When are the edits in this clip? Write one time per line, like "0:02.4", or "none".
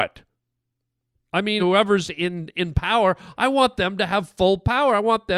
0:01.6